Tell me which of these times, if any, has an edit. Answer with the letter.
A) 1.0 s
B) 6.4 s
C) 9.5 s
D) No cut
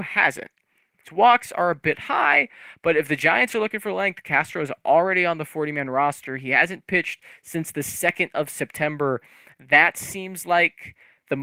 A